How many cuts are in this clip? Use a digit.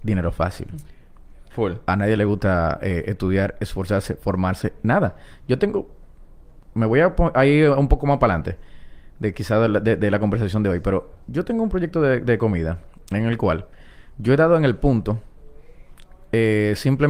1